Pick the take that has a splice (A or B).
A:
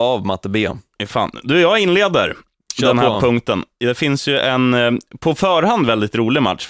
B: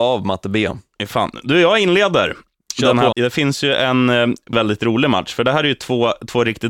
B